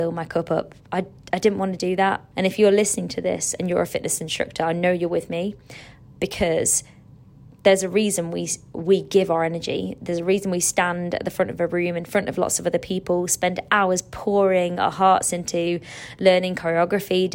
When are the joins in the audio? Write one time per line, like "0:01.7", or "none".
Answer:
0:02.3